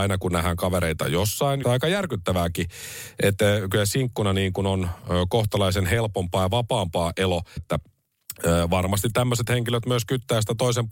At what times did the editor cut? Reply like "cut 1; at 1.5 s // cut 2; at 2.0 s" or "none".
cut 1; at 1.6 s // cut 2; at 7.6 s